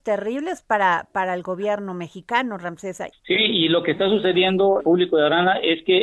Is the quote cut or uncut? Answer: cut